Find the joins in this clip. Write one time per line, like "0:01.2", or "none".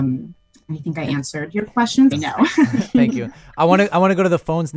0:02.1